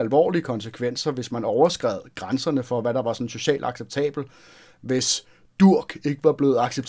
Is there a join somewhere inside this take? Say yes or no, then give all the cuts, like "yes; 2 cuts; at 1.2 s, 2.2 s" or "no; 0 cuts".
no; 0 cuts